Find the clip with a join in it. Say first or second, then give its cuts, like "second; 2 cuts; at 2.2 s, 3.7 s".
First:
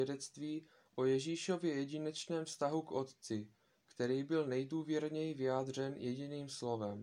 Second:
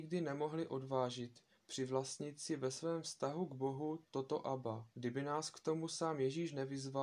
second; 1 cut; at 4.9 s